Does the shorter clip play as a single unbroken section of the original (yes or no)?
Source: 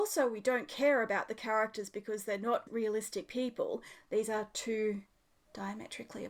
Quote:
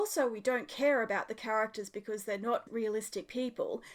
yes